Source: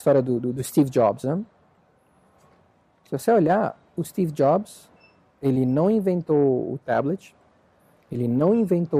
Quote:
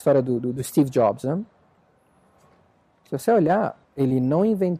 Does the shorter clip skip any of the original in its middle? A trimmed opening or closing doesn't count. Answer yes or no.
yes